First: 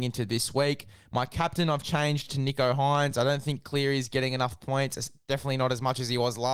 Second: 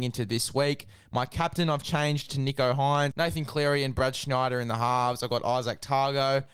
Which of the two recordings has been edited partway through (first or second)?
second